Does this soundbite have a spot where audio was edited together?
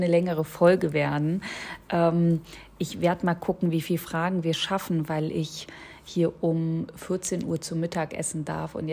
no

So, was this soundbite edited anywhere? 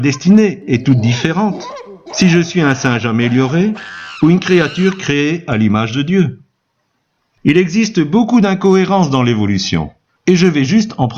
no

